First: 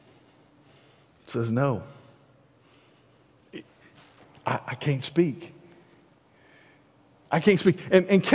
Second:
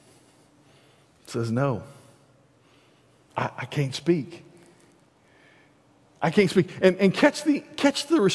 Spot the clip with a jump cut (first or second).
second